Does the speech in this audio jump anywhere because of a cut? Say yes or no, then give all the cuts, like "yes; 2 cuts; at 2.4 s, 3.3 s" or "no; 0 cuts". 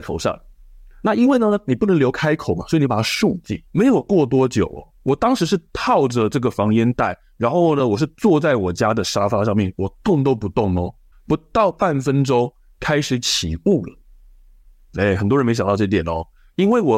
yes; 1 cut; at 3.7 s